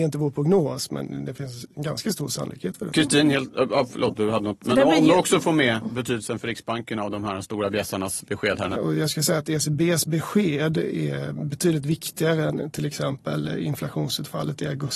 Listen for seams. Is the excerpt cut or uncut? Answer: cut